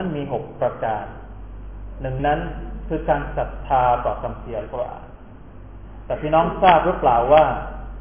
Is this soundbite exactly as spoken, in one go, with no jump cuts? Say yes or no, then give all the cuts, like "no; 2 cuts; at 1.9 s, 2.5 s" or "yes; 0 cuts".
no; 1 cut; at 2.2 s